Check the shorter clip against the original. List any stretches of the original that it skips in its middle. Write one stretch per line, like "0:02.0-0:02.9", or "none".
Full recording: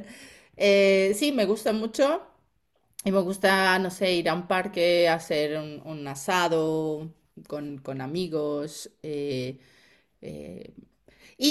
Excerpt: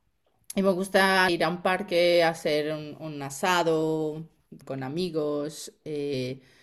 0:03.8-0:04.1
0:07.5-0:07.8